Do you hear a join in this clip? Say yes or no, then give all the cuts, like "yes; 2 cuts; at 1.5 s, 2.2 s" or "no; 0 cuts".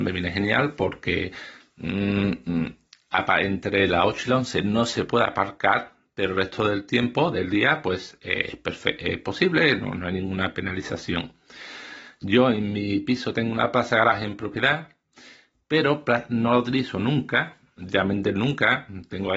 no; 0 cuts